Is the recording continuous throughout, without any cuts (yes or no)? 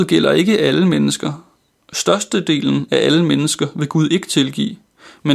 yes